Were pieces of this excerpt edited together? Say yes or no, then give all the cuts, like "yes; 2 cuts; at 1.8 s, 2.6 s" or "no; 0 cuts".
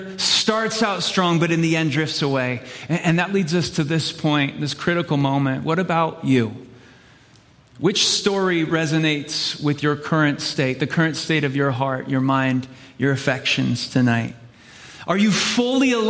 no; 0 cuts